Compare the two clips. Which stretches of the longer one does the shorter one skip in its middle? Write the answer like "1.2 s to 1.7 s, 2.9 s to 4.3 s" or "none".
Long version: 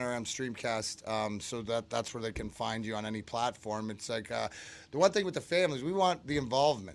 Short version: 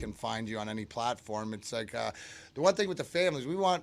none